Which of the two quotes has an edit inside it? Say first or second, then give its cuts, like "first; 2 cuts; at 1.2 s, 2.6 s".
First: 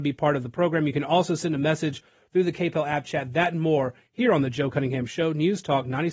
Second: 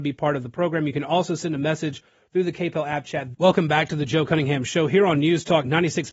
second; 1 cut; at 3.3 s